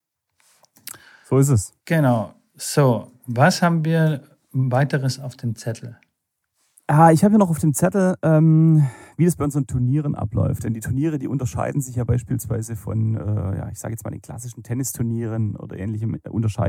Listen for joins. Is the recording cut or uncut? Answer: cut